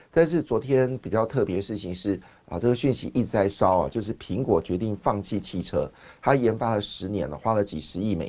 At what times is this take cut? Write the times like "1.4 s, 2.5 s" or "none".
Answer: none